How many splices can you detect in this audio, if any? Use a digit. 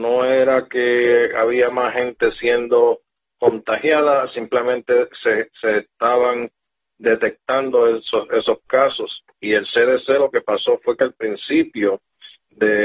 0